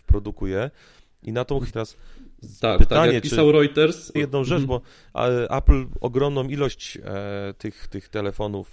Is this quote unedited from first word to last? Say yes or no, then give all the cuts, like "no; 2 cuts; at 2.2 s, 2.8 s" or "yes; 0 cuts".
no; 2 cuts; at 1.7 s, 4.2 s